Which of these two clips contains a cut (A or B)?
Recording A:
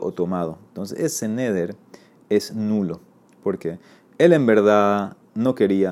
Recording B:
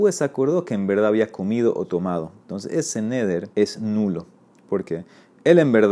B